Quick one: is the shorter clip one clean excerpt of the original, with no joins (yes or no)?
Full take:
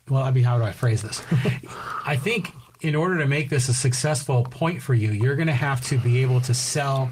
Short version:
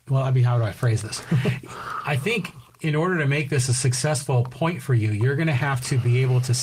yes